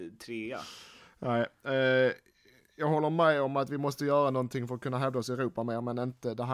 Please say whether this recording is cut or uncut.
uncut